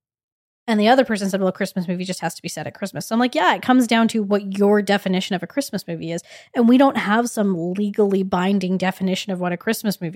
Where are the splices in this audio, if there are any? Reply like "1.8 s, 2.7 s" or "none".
none